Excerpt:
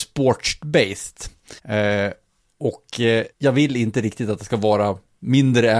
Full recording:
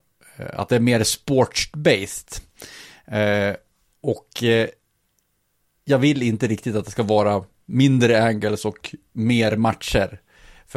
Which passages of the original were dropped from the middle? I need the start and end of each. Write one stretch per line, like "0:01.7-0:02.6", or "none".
0:02.7-0:03.0
0:04.7-0:05.8